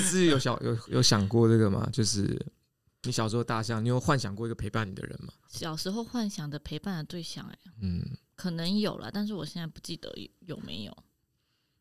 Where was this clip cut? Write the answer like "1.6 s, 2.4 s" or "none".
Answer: 5.5 s

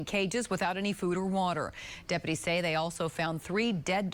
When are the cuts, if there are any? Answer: none

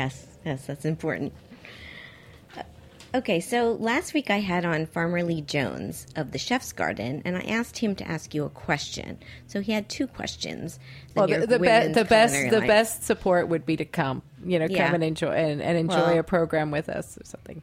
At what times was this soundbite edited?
11.1 s

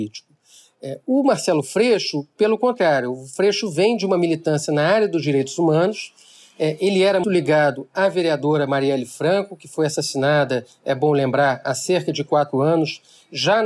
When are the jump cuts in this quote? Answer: 7.2 s

